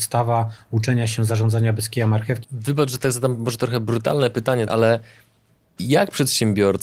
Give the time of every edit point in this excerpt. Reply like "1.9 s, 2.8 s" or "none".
2.4 s, 4.7 s